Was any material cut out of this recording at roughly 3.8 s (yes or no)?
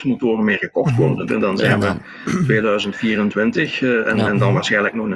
no